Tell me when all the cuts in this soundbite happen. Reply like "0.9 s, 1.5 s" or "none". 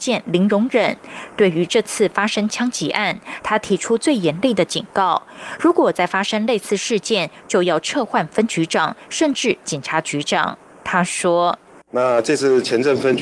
none